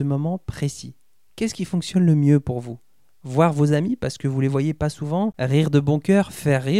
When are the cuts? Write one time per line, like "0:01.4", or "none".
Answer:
none